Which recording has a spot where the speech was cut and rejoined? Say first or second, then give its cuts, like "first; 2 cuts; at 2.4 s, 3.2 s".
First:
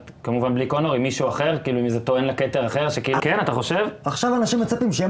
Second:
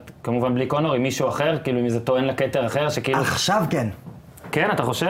first; 1 cut; at 3.2 s